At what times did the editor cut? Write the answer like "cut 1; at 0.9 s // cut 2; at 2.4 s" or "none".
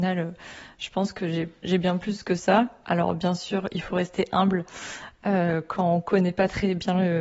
none

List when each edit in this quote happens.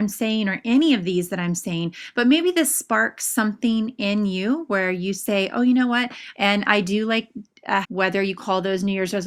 cut 1; at 6.3 s // cut 2; at 7.8 s

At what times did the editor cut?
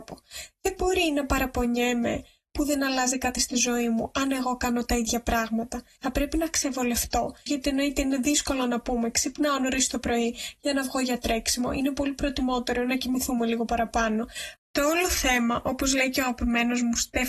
cut 1; at 6.0 s // cut 2; at 7.5 s // cut 3; at 14.6 s

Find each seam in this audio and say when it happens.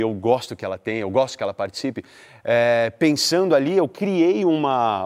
none

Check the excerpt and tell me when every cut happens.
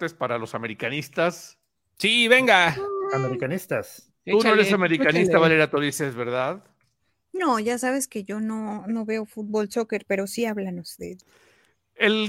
none

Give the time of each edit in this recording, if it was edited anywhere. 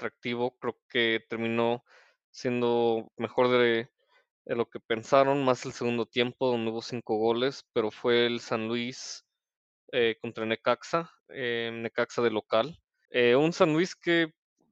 cut 1; at 13.1 s

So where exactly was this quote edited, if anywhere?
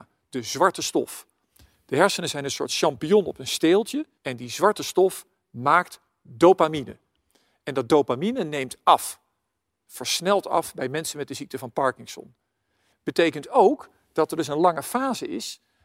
cut 1; at 4.2 s

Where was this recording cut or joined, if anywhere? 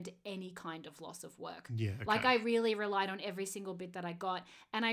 none

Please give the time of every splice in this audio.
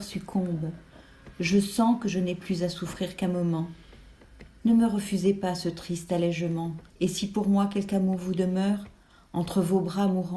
cut 1; at 6.9 s

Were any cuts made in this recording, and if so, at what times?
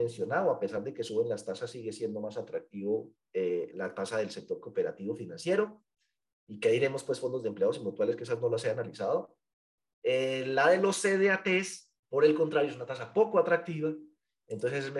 cut 1; at 12.0 s

